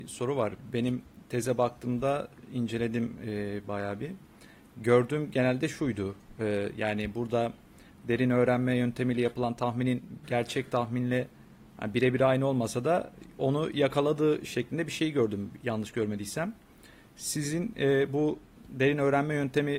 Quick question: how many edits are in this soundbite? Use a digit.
0